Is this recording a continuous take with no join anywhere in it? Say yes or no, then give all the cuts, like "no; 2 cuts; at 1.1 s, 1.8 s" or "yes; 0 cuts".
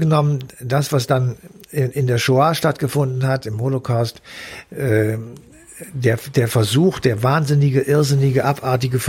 yes; 0 cuts